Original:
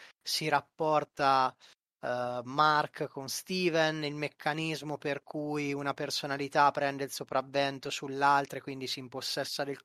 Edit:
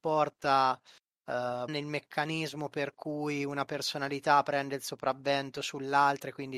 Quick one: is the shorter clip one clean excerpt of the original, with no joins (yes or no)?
no